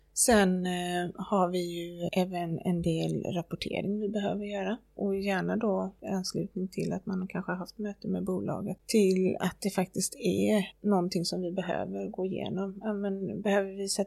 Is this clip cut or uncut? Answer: cut